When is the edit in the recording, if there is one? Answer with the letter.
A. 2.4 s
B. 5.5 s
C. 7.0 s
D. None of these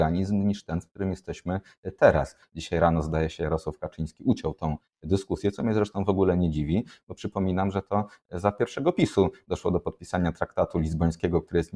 A